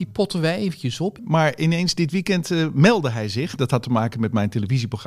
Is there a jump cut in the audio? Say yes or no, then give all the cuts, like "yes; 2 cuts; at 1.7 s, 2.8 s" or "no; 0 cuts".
yes; 1 cut; at 1.2 s